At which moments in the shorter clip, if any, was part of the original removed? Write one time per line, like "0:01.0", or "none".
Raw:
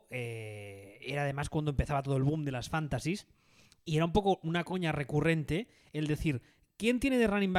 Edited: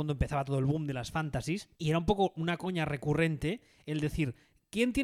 0:01.7

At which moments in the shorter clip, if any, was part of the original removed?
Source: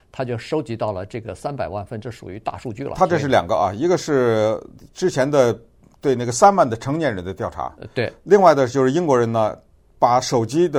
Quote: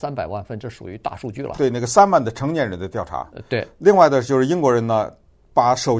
0:01.5

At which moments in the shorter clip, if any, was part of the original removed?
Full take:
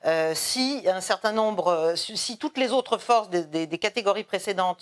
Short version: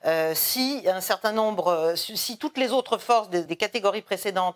0:03.5

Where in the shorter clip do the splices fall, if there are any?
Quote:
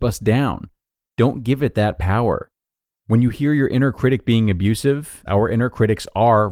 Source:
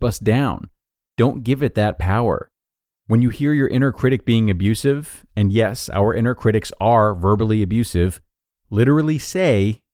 0:05.3

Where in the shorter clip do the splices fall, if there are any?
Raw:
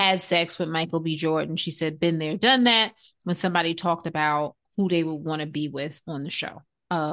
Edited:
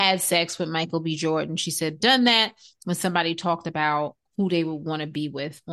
0:02.0

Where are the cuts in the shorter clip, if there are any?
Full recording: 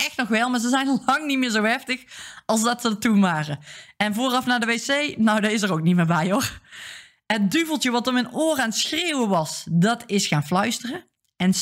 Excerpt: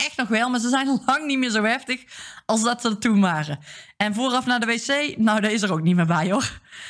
none

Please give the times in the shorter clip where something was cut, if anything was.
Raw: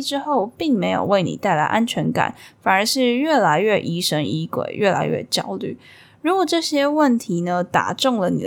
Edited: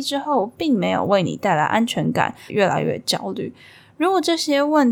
0:02.5

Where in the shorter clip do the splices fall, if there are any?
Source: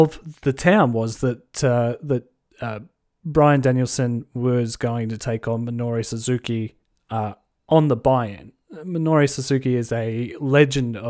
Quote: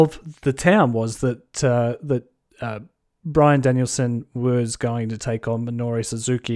none

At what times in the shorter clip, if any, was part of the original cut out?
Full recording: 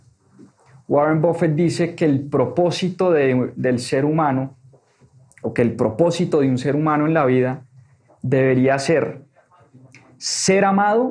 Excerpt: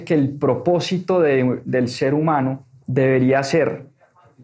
0:02.8

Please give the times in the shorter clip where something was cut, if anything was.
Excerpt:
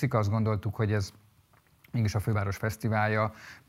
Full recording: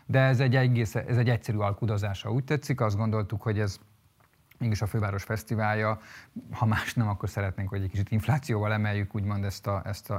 none

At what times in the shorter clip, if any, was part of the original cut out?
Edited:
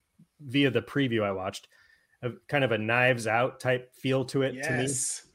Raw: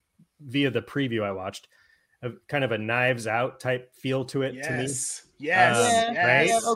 none

